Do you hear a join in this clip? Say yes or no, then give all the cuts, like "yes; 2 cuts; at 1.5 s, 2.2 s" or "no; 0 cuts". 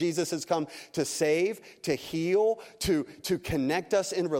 no; 0 cuts